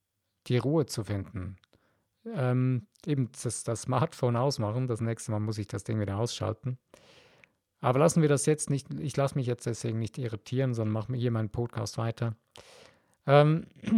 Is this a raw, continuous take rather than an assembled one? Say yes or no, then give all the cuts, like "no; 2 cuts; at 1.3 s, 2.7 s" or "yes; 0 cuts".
yes; 0 cuts